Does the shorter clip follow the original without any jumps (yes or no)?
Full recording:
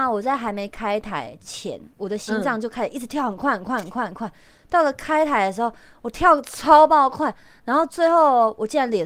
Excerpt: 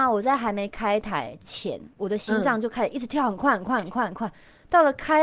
yes